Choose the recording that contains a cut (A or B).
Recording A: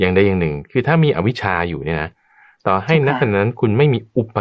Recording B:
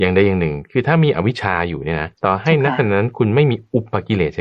B